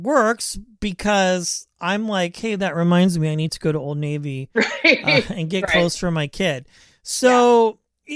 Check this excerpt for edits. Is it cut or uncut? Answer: uncut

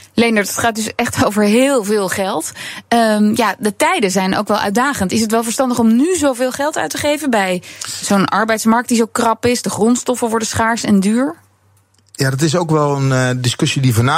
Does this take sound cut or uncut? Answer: uncut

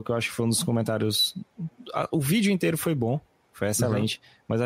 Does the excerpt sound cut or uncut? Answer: uncut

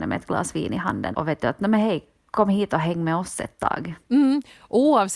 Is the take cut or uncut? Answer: cut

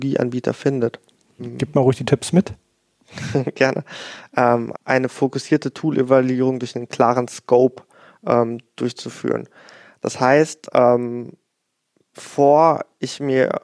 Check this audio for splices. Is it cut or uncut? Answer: cut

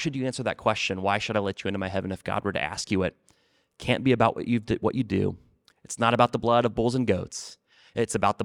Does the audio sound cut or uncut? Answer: uncut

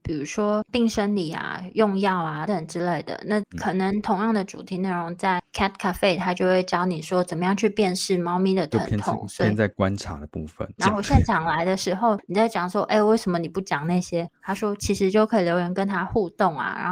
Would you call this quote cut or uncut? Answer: cut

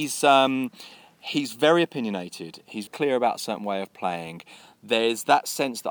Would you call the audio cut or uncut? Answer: cut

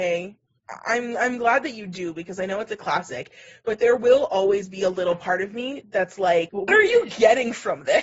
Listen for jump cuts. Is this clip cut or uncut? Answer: cut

